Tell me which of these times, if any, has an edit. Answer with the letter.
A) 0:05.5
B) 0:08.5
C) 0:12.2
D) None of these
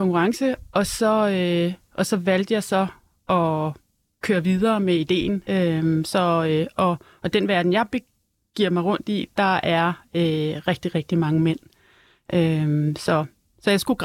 A